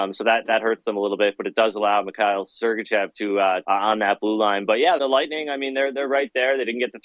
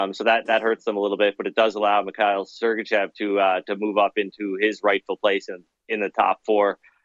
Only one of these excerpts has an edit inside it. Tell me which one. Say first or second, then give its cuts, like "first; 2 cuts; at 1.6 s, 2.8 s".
first; 2 cuts; at 3.6 s, 5.0 s